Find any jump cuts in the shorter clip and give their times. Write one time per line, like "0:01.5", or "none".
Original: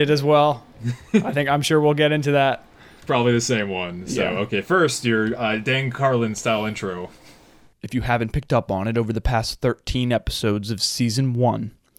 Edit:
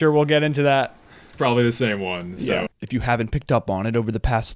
0:02.7